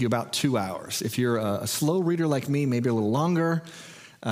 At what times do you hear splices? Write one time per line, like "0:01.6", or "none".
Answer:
none